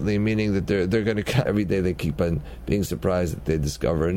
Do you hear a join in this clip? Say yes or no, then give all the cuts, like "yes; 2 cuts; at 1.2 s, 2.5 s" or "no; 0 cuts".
yes; 1 cut; at 1.5 s